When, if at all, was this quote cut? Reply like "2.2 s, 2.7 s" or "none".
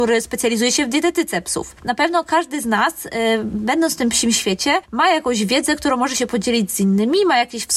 none